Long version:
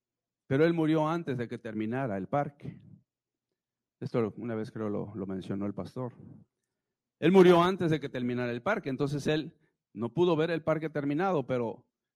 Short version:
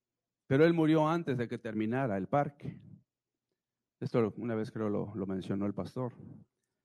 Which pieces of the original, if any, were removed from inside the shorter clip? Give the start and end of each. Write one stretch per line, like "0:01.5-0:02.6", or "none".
none

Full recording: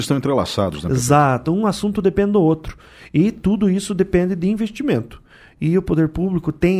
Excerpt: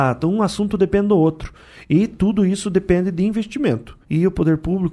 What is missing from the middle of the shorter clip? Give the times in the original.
0:05.3-0:05.5

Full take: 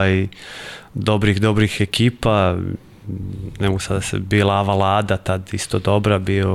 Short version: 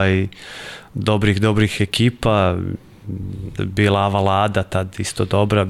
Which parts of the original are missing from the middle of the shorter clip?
0:03.6-0:04.1

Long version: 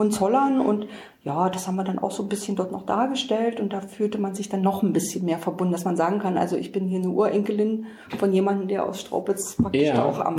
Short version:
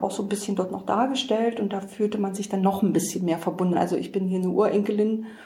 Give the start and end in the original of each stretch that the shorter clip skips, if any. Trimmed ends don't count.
0:05.7-0:06.3

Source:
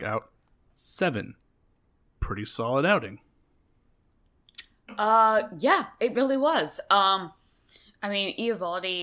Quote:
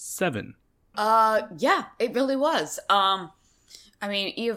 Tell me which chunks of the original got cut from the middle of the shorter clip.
0:01.7-0:05.0

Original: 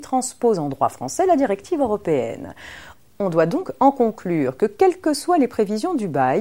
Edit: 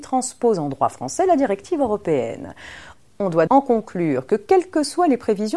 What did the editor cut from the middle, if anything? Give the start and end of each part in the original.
0:03.5-0:03.8

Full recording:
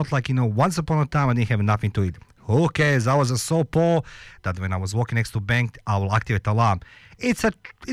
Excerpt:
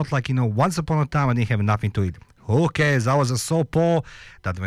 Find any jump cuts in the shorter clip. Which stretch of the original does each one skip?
none

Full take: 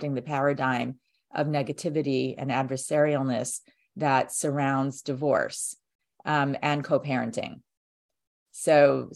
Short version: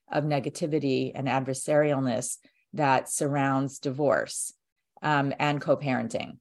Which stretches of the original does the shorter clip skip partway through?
none

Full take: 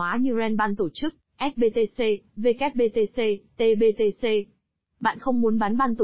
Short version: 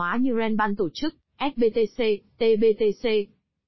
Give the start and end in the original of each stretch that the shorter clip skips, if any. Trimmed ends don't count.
0:02.3-0:03.5

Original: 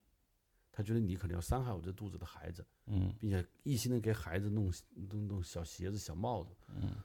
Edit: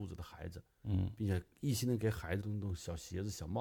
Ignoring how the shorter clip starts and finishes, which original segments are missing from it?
0:04.4-0:05.1

